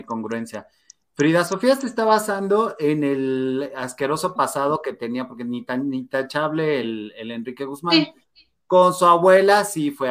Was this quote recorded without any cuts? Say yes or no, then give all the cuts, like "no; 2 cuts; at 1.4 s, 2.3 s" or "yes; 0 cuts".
yes; 0 cuts